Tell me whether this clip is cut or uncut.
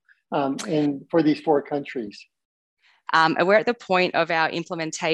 cut